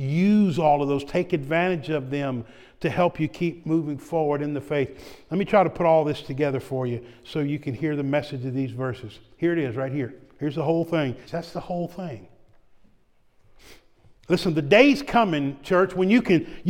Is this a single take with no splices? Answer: no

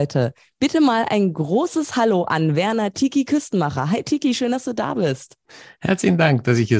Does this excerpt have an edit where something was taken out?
no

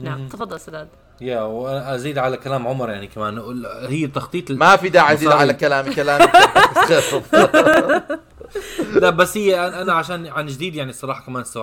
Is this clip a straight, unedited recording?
yes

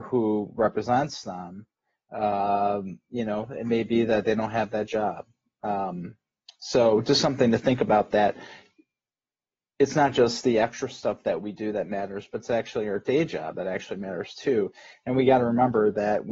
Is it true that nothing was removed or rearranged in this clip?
yes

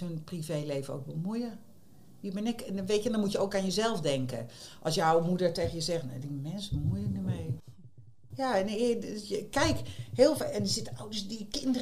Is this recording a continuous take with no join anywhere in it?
yes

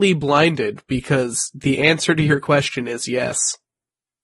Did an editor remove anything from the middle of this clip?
no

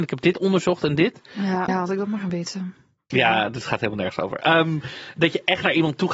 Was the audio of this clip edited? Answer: yes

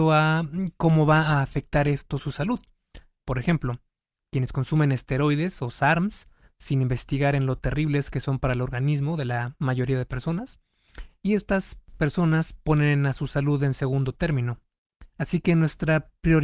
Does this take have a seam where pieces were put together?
yes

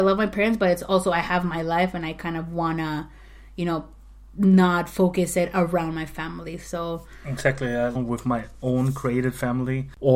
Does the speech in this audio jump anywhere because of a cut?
yes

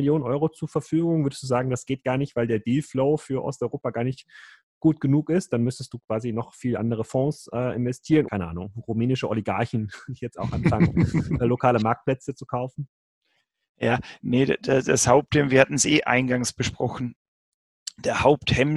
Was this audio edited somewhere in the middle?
yes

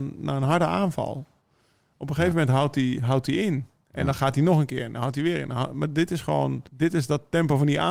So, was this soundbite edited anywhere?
yes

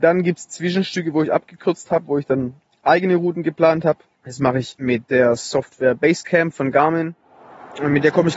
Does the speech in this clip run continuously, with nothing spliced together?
yes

